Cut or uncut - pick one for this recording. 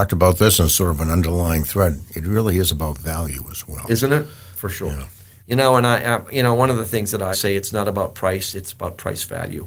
cut